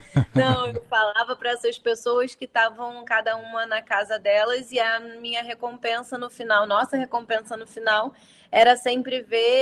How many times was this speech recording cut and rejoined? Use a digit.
0